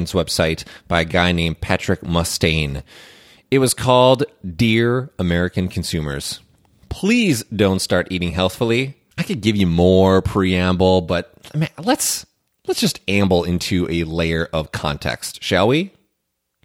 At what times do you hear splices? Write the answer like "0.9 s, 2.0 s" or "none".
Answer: 9.1 s